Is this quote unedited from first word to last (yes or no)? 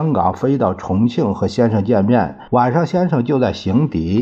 no